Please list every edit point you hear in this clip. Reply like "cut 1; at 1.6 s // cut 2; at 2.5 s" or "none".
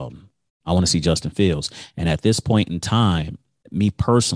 none

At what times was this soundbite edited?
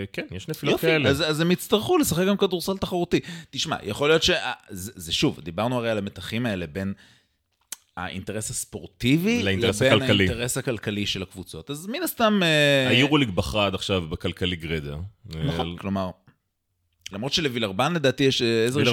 cut 1; at 15.7 s // cut 2; at 17.1 s

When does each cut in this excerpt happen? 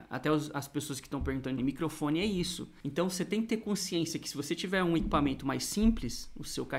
cut 1; at 1.6 s // cut 2; at 2.8 s

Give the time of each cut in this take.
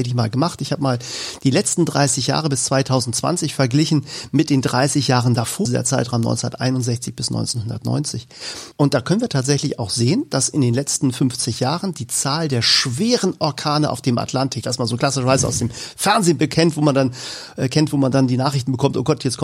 cut 1; at 5.6 s // cut 2; at 8.7 s // cut 3; at 14.6 s

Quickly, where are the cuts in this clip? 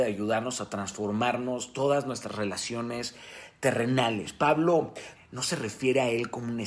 cut 1; at 5.2 s

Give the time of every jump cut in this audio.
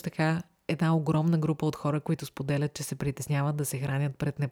none

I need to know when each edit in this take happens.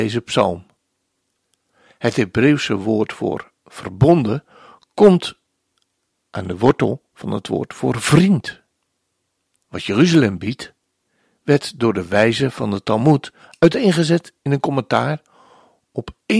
cut 1; at 1.9 s // cut 2; at 9.6 s

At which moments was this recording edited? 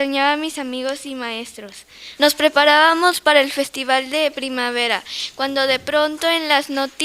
cut 1; at 2.2 s

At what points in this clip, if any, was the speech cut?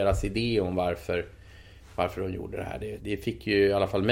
cut 1; at 3.0 s

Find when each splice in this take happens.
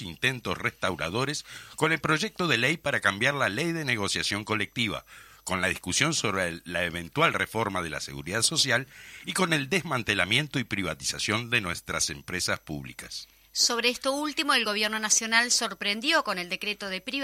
none

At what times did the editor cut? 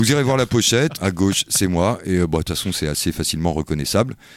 cut 1; at 1.0 s

